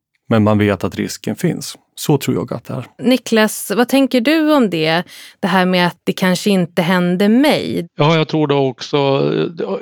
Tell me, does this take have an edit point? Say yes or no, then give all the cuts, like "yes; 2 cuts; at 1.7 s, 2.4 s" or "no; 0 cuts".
no; 0 cuts